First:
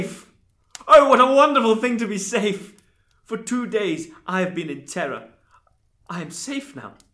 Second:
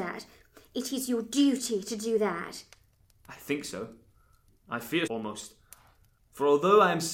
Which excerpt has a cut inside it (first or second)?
second